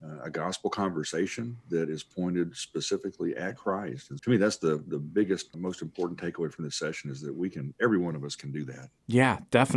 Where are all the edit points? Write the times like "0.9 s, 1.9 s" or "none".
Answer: 4.2 s, 5.5 s